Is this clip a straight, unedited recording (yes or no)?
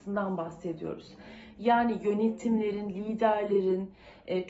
yes